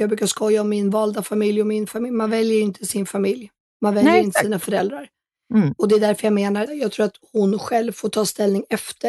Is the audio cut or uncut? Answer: cut